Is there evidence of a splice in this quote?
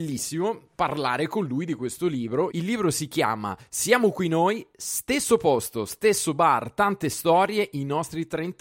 yes; 1 cut; at 2.5 s

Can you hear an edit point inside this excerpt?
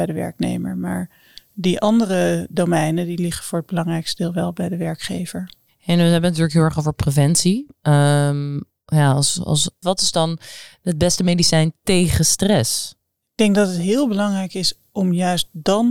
yes; 2 cuts; at 8.7 s, 9.8 s

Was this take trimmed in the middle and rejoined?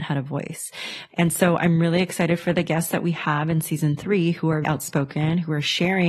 yes; 2 cuts; at 1.1 s, 4.6 s

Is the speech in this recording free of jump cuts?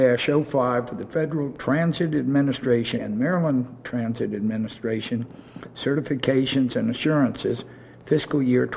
no; 1 cut; at 3.0 s

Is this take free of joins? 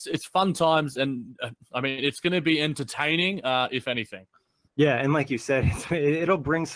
yes; 0 cuts

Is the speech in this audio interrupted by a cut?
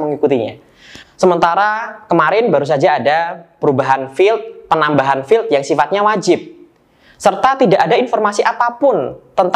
yes; 1 cut; at 1.0 s

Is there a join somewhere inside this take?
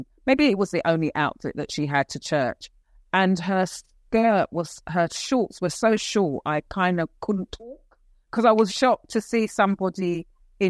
yes; 1 cut; at 8.7 s

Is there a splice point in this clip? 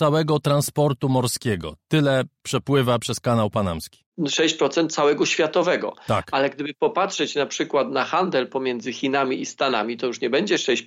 no; 0 cuts

